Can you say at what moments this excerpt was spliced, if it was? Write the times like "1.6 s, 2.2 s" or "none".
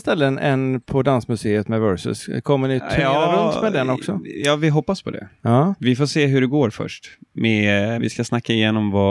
8.0 s